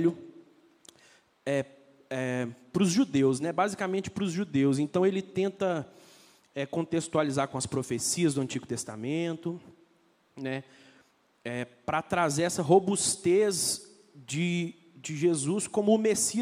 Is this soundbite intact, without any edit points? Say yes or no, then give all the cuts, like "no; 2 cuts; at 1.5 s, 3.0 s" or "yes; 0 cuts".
yes; 0 cuts